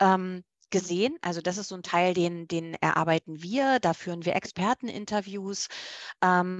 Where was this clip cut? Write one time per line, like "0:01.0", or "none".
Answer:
none